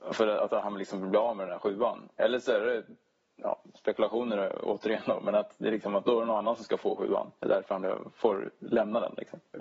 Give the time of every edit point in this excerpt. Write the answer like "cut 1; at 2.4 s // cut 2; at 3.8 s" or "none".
none